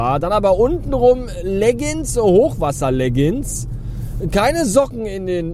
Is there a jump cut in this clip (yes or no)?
no